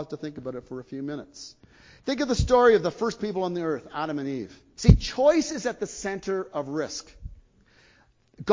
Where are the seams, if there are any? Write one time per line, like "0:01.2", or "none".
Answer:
0:04.8